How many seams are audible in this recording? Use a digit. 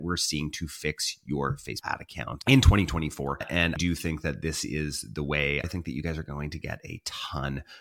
2